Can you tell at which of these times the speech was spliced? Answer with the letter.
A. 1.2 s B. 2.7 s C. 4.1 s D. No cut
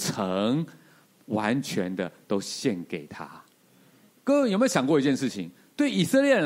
C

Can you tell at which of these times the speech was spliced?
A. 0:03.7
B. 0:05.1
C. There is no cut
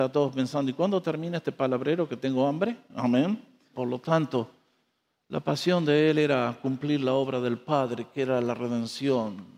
A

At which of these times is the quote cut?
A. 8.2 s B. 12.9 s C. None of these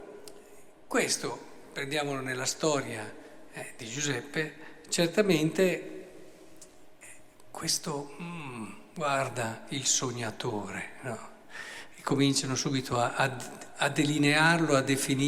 C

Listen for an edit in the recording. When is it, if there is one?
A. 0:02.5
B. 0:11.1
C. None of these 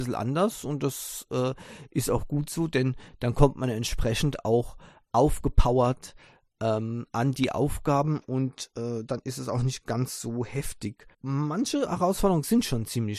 B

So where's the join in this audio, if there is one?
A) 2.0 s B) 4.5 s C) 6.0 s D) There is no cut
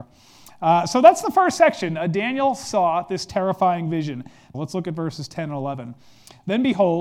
B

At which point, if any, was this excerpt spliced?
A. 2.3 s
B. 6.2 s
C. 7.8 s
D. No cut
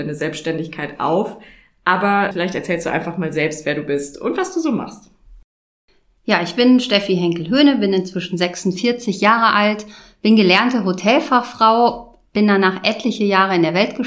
A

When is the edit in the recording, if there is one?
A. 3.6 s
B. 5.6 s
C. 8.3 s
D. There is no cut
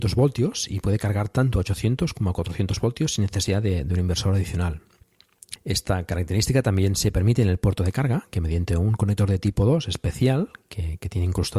B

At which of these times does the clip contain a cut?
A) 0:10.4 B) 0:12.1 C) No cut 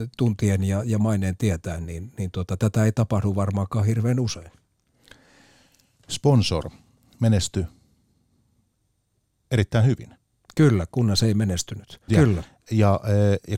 B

